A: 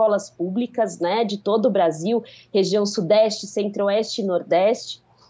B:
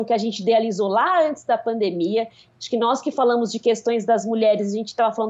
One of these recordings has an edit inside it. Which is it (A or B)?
B